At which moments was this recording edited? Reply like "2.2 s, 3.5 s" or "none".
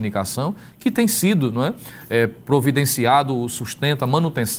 none